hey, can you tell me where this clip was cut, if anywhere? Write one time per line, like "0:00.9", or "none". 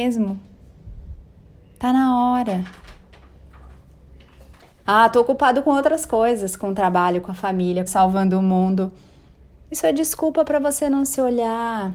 0:04.8
0:07.9

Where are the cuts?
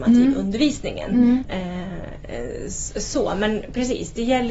0:01.4

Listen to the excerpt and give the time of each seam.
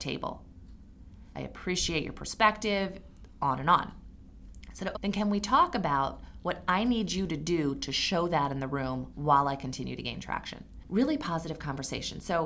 0:01.3
0:04.9

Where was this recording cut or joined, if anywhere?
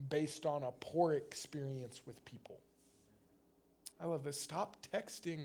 0:03.9

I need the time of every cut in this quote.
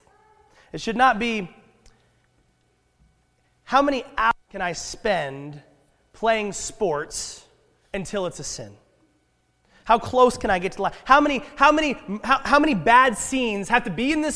0:04.4

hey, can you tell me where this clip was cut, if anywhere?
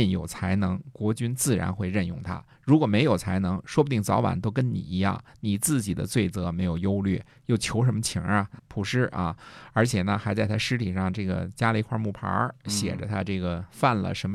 0:08.6

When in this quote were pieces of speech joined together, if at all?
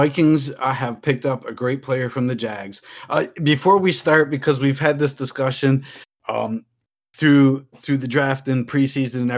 none

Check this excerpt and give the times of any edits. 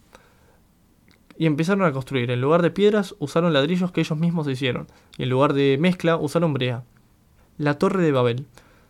0:07.4

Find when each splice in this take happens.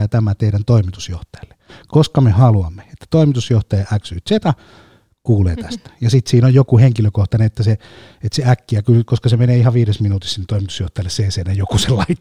none

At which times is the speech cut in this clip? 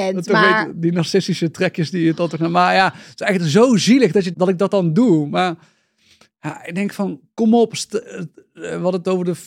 0:04.3

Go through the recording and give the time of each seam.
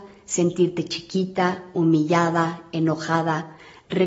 none

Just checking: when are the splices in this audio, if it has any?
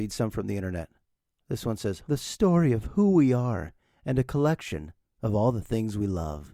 0:02.0

